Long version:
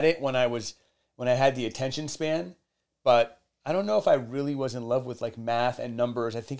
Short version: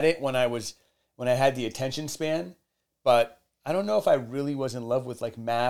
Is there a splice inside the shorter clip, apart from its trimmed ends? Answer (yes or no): no